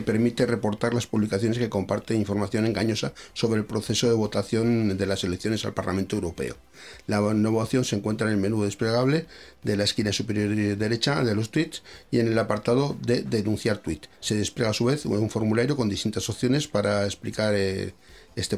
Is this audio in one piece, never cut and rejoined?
yes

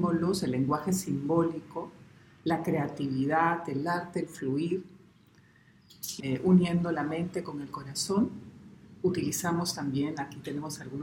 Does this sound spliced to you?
yes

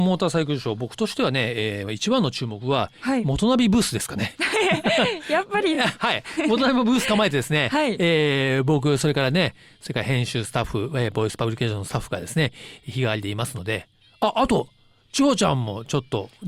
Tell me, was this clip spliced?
no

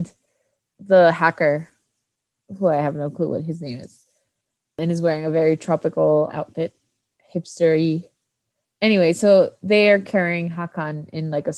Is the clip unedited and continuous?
no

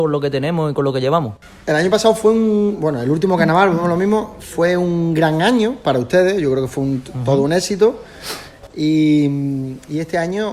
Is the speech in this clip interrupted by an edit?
no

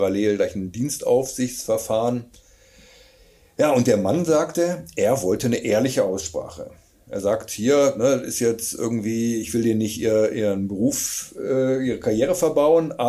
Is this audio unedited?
yes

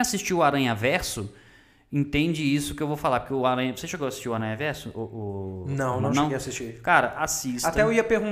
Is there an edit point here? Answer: no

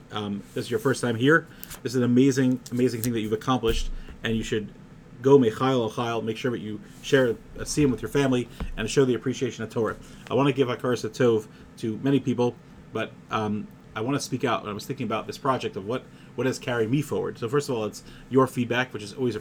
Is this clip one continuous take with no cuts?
yes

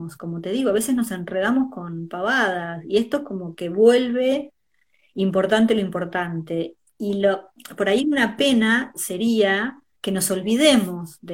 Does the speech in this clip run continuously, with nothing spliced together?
yes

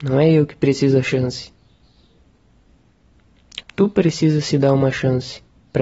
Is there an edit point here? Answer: yes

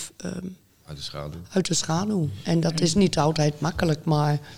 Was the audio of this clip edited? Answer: no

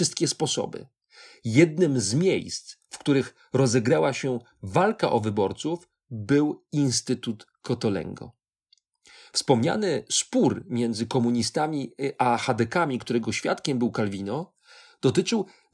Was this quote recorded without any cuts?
yes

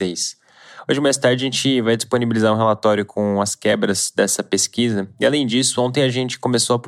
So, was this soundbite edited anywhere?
no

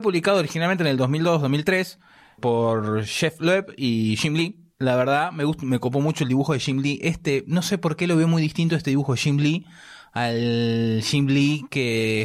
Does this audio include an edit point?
no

